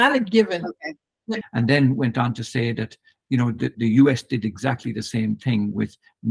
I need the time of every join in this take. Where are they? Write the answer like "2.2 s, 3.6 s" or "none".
1.4 s, 3.7 s